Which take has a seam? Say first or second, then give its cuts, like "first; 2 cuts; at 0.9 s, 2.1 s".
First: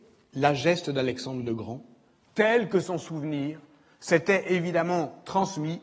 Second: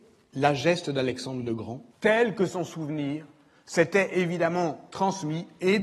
second; 1 cut; at 1.9 s